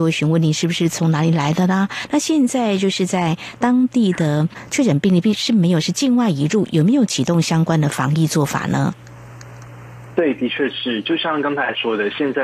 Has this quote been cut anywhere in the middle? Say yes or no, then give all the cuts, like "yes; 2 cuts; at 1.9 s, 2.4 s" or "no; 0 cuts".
no; 0 cuts